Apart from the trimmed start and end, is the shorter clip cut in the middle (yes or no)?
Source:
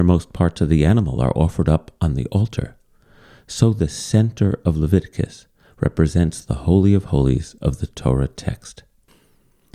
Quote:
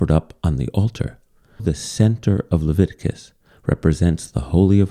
yes